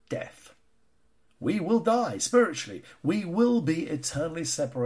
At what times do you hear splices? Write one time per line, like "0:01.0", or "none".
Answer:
none